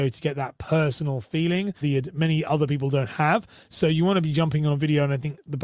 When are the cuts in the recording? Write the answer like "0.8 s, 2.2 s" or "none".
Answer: 1.8 s

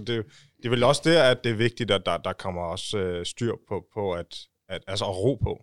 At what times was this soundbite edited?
none

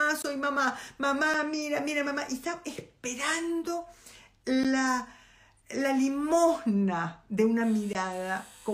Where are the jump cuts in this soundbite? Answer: none

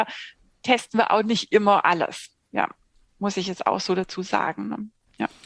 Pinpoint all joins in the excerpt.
none

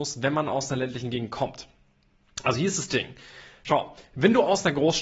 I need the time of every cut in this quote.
none

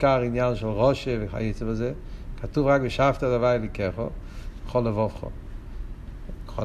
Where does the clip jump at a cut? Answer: 4.6 s

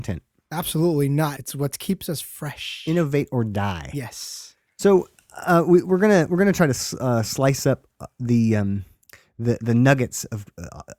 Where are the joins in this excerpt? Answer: 1.4 s

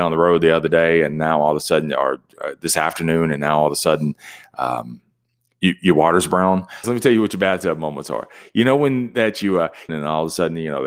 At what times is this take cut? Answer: 6.8 s, 9.9 s

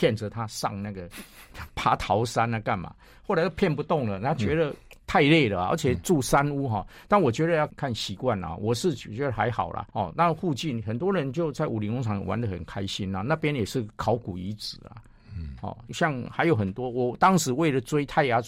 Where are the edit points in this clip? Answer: 7.7 s, 9.9 s, 15.9 s

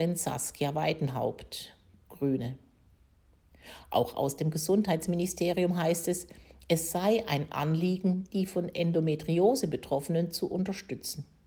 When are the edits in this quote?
none

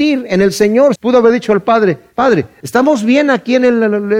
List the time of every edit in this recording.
1.0 s, 2.6 s

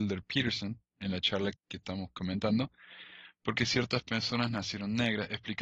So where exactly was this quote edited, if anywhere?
1.5 s

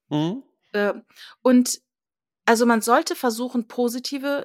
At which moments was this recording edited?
none

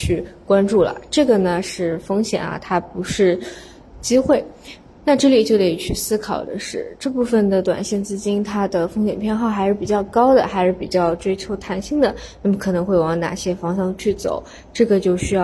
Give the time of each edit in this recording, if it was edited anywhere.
none

